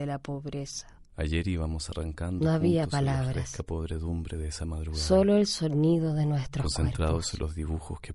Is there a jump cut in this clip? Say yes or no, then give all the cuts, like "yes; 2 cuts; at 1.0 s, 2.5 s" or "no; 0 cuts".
no; 0 cuts